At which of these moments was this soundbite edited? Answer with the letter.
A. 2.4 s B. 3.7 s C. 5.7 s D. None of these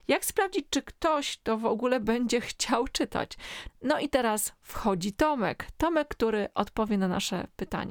B